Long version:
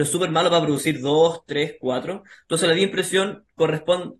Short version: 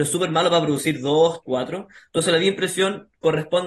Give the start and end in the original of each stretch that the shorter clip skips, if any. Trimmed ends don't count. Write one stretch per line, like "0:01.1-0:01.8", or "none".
0:01.4-0:01.8